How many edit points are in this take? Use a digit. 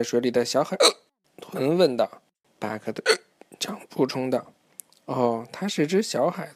2